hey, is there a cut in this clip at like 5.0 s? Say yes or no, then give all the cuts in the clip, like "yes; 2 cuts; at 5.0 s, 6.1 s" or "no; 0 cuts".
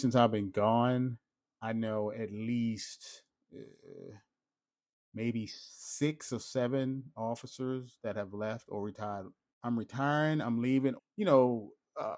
no; 2 cuts; at 9.5 s, 11.0 s